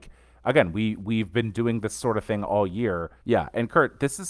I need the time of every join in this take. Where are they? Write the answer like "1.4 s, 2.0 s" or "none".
3.2 s

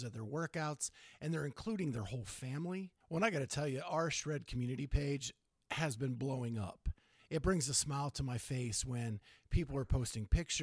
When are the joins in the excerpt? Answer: 3.0 s, 7.2 s

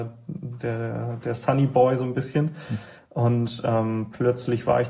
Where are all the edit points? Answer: none

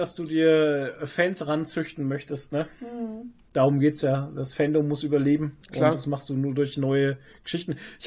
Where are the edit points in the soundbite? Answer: none

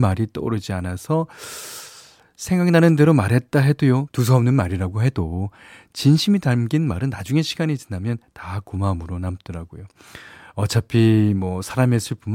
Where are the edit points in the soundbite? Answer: 4.1 s

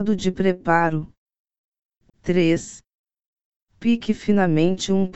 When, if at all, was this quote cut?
2.1 s

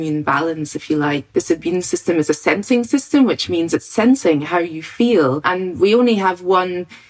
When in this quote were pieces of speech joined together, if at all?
1.3 s

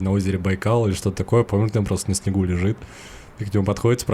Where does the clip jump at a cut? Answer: none

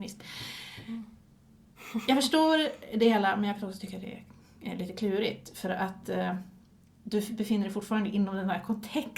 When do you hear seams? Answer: none

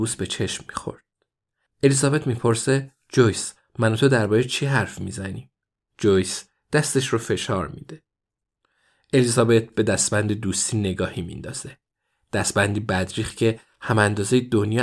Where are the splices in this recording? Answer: 5.9 s

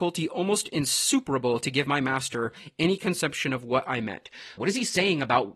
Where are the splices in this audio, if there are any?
4.6 s

